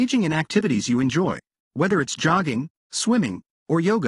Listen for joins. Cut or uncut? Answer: cut